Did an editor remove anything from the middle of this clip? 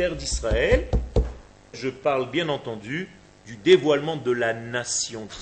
yes; 1 cut; at 1.7 s

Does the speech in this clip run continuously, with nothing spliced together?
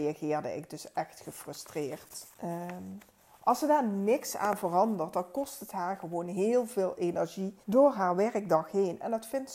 no; 2 cuts; at 2.3 s, 7.6 s

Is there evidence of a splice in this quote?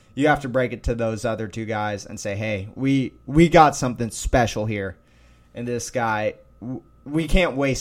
no; 0 cuts

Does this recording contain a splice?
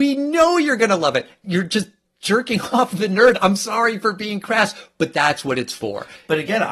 no; 0 cuts

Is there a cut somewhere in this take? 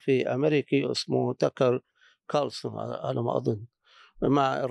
no; 0 cuts

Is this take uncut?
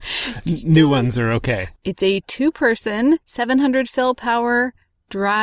no; 1 cut; at 1.8 s

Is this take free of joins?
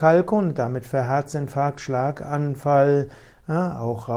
yes; 0 cuts

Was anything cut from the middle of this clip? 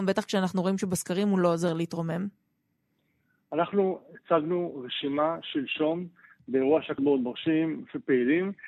yes; 1 cut; at 7.0 s

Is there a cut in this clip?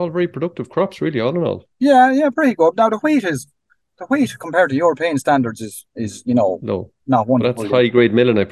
no; 0 cuts

